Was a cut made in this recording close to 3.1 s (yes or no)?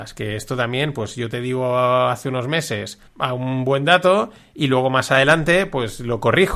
yes